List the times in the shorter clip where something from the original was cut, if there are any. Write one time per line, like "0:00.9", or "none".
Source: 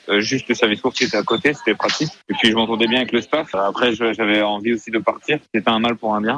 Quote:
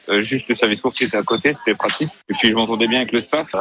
none